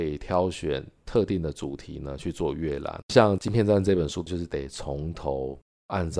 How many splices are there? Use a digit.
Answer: 1